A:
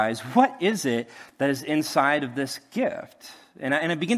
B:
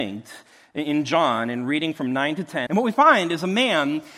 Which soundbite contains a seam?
B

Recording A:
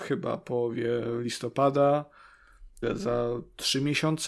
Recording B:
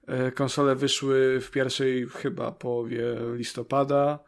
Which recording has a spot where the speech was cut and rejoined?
A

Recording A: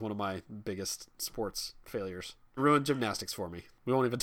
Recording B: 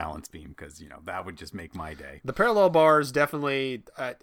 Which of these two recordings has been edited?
A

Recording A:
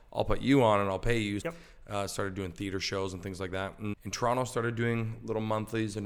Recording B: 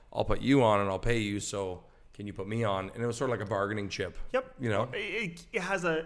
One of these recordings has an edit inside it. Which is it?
A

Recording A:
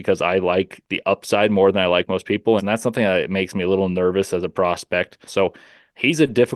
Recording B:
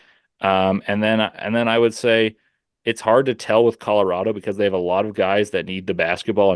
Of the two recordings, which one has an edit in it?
A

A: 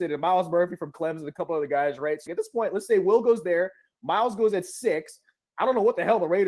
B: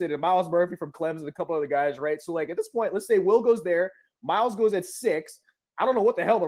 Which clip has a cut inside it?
A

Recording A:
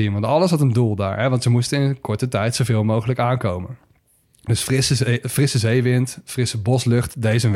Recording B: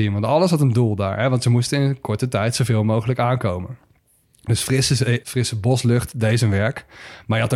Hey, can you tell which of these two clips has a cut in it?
B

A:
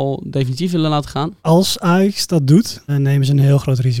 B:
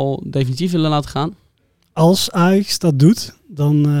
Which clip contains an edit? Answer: A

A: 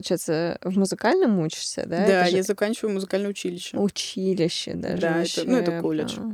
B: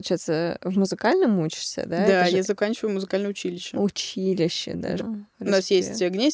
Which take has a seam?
B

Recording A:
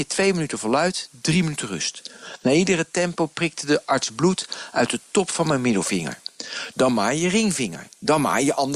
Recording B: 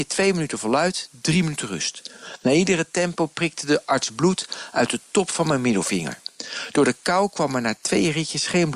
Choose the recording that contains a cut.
A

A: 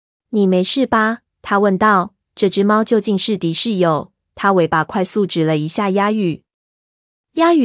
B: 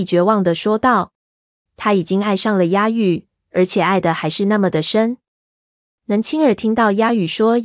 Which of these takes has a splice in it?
B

